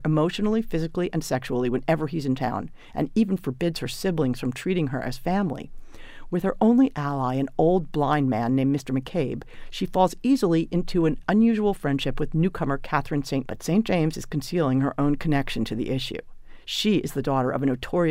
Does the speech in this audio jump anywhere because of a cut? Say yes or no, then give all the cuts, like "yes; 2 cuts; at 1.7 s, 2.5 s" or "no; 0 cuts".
yes; 1 cut; at 13.4 s